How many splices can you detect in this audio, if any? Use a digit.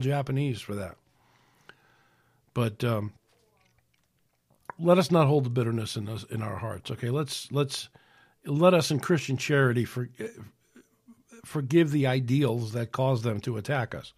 1